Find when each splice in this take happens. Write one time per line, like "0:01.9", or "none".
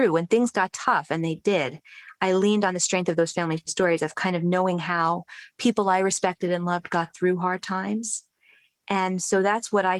none